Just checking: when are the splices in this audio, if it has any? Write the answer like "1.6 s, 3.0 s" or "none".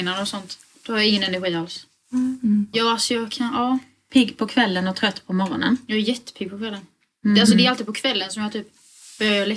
2.7 s